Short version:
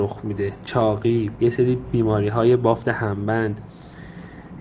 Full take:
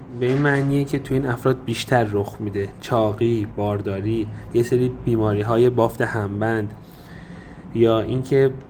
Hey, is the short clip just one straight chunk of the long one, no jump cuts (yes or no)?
no